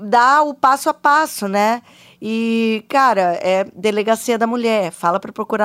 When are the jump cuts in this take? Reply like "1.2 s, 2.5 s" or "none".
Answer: none